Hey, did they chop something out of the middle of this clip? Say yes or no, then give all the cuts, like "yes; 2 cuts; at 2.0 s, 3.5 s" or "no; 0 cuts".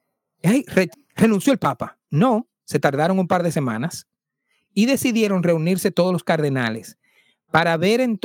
yes; 2 cuts; at 0.9 s, 2.1 s